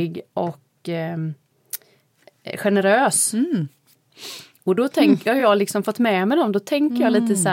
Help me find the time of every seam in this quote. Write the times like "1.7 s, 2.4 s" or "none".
none